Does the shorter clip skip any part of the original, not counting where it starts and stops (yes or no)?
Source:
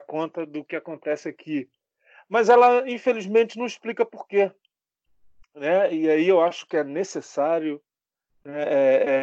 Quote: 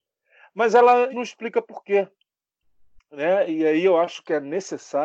yes